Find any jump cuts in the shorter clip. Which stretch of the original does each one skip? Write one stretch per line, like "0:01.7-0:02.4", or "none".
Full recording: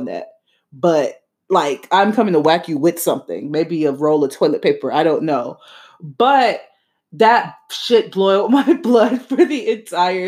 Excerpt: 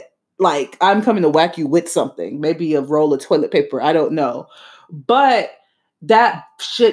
none